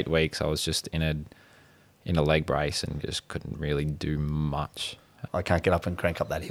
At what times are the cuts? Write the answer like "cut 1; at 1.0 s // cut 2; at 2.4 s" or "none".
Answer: cut 1; at 5.3 s